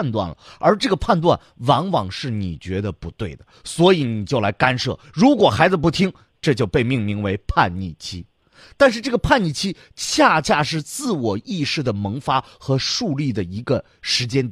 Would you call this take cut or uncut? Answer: uncut